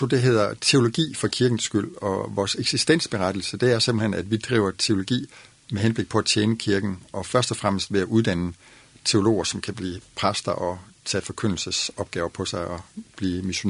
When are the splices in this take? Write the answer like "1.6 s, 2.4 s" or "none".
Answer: none